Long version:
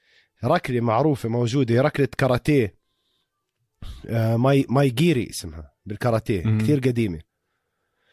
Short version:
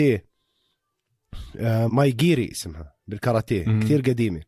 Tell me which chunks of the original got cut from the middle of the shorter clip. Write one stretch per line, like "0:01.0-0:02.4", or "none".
0:04.4-0:04.7